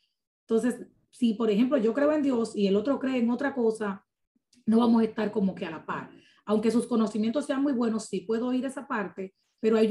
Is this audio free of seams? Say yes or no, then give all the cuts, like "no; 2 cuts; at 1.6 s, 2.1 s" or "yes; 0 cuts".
yes; 0 cuts